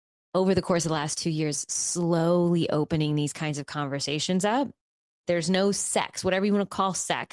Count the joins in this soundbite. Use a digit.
1